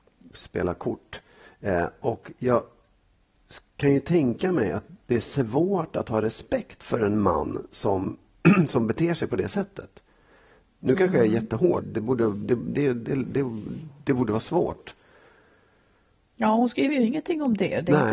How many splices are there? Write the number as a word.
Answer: one